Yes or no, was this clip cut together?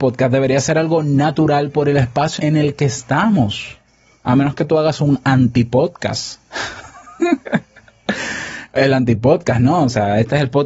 yes